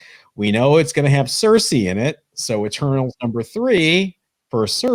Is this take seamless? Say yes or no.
yes